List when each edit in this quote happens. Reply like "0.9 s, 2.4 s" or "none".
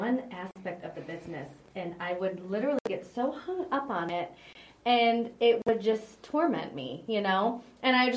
none